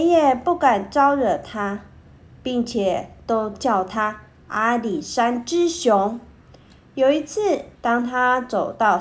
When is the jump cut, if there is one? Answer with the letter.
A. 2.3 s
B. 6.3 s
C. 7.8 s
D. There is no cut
C